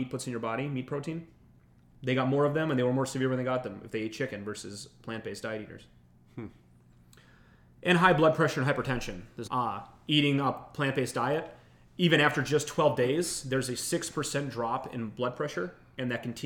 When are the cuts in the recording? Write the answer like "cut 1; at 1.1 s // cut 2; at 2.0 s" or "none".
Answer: cut 1; at 1.9 s // cut 2; at 9.5 s